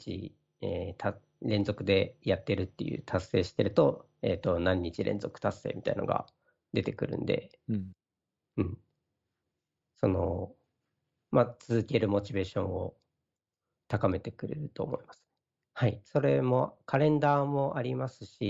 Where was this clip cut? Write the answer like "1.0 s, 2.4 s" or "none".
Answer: 15.6 s